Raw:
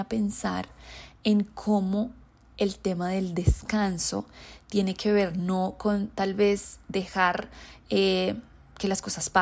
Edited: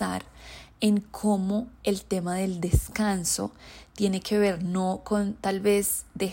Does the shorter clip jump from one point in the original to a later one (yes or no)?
yes